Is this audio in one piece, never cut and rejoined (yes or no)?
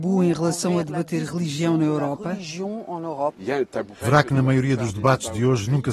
no